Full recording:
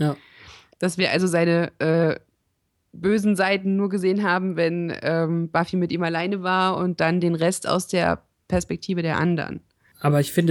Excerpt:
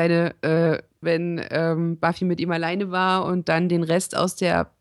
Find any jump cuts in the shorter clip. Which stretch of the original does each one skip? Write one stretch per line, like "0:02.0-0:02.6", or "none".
0:02.4-0:04.5